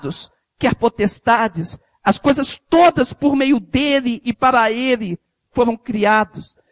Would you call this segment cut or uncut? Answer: uncut